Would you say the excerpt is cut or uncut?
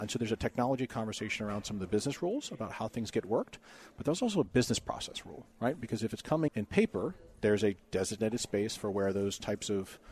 cut